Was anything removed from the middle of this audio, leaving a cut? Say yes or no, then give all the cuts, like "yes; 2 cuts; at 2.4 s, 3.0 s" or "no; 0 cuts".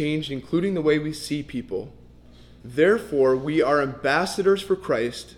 yes; 1 cut; at 2.6 s